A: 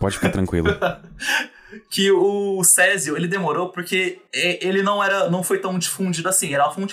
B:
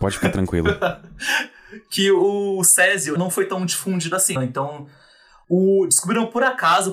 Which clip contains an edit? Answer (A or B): B